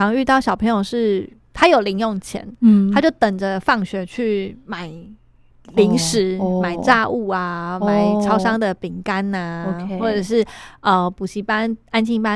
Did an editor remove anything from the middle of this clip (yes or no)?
no